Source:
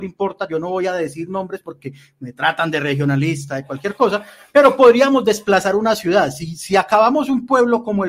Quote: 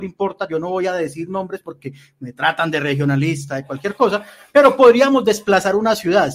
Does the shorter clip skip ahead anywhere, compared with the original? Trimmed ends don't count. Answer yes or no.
no